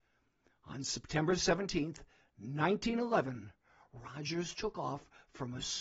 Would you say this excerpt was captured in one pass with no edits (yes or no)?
yes